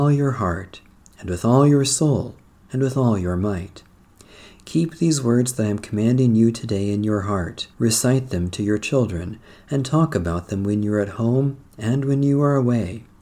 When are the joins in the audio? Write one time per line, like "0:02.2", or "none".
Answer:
0:07.7